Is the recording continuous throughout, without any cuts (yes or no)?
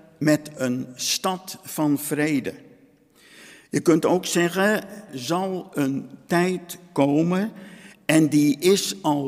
no